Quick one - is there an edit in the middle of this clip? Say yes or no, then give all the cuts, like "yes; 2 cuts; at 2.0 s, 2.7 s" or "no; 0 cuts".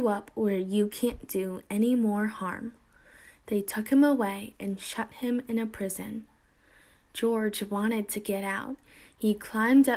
no; 0 cuts